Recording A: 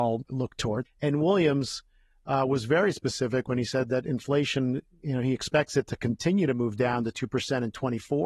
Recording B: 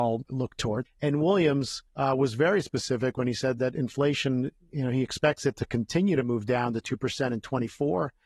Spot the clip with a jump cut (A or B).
B